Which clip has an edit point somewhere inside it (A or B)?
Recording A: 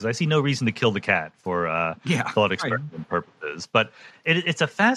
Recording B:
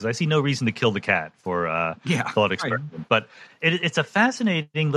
B